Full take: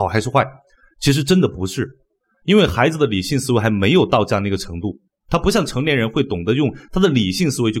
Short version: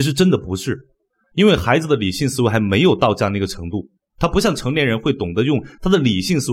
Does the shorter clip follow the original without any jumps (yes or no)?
yes